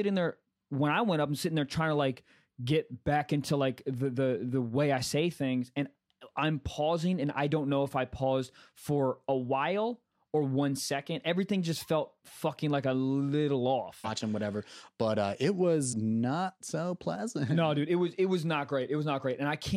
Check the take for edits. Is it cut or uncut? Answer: cut